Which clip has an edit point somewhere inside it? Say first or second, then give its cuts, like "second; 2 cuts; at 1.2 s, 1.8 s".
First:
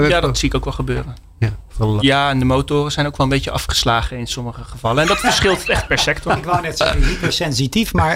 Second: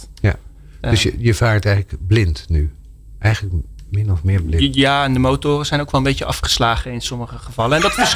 first; 1 cut; at 2.0 s